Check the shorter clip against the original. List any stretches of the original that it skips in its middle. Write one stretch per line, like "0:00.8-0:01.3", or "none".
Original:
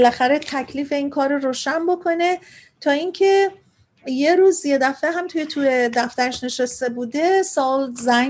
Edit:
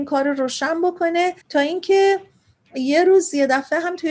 0:02.5-0:02.7